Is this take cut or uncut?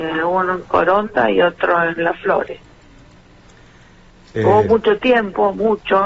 uncut